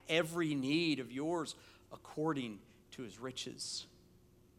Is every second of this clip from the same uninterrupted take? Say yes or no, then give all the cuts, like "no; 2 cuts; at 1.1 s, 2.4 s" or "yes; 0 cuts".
yes; 0 cuts